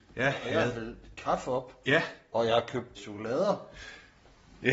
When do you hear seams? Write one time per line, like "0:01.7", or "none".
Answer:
0:03.0